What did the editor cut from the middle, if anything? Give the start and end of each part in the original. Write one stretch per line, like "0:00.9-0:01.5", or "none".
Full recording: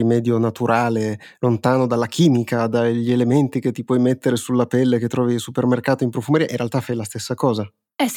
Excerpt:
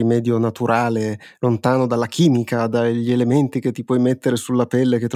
none